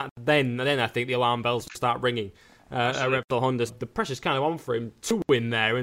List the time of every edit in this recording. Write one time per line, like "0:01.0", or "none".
0:03.7